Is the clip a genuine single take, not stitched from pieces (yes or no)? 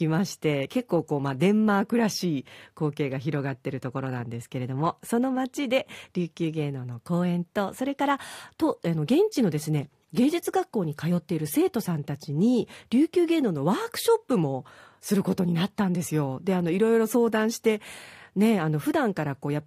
yes